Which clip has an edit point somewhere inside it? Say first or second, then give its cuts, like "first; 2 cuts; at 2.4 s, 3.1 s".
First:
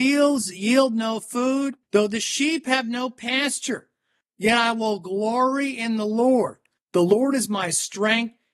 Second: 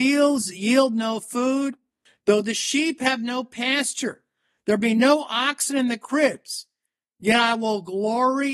first; 3 cuts; at 1.8 s, 4.2 s, 6.8 s